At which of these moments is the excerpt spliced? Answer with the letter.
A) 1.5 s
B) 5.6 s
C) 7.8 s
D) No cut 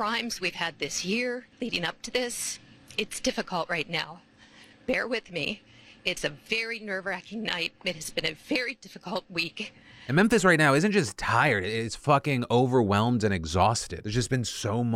A